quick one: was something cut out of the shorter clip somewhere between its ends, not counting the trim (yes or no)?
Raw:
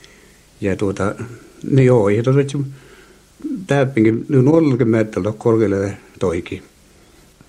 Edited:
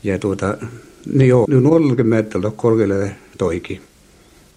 yes